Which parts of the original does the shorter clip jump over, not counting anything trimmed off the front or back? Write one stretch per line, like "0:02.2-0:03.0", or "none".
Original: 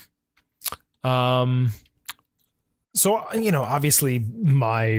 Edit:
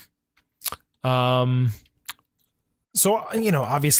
none